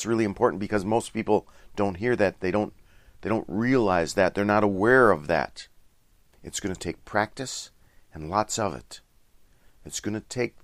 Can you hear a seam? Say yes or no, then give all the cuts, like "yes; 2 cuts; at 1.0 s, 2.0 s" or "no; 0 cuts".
yes; 1 cut; at 6.3 s